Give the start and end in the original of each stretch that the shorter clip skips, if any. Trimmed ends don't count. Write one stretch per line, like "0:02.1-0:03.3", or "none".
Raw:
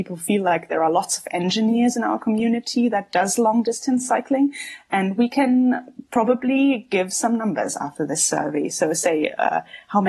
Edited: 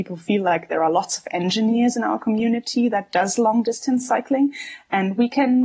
none